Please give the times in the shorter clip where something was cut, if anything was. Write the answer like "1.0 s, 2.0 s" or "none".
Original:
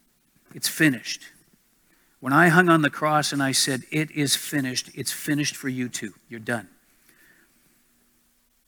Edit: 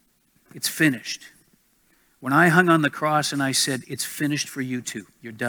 3.8 s